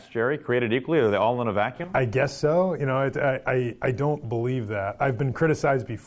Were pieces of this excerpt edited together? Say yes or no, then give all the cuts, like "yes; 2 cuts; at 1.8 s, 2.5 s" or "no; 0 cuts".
no; 0 cuts